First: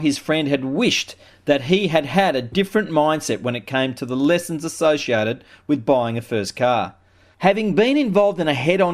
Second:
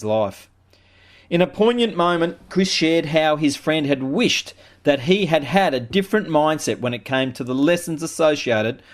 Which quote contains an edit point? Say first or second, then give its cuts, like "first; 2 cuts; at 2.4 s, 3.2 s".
first; 1 cut; at 7.3 s